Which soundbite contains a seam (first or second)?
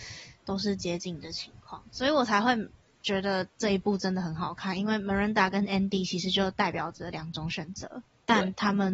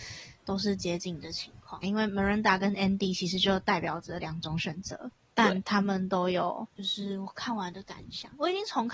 second